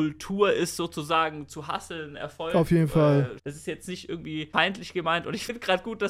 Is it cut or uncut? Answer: cut